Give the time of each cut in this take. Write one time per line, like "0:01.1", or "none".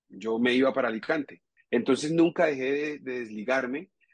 0:01.6